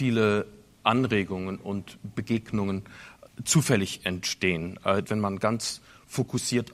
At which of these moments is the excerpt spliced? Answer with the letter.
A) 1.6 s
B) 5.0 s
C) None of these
B